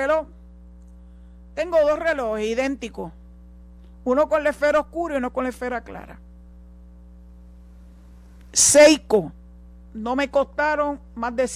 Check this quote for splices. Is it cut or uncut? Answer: uncut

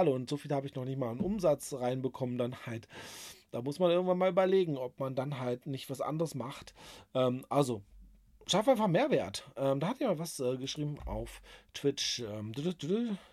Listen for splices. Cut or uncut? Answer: uncut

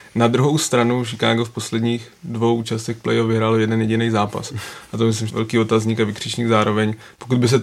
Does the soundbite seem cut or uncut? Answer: cut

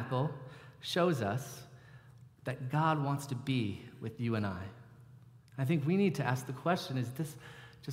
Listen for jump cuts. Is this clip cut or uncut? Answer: uncut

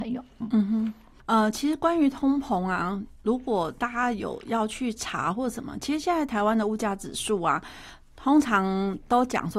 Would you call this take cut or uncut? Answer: uncut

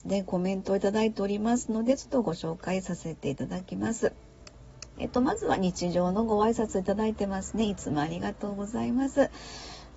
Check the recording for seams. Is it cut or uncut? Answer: cut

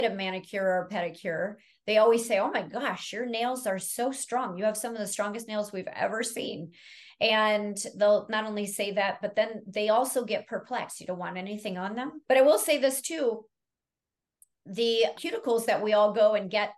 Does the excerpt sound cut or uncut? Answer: cut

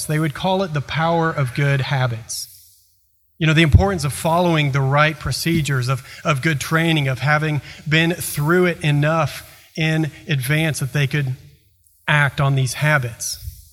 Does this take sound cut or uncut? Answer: uncut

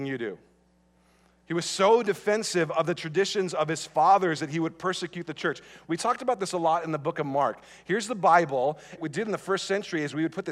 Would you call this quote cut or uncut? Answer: cut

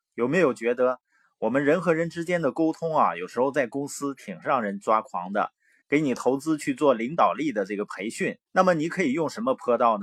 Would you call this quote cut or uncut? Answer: cut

